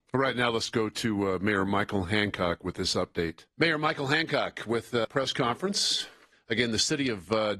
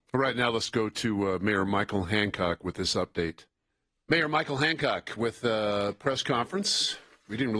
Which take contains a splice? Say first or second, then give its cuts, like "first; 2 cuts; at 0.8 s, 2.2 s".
first; 3 cuts; at 3.5 s, 5.0 s, 6.3 s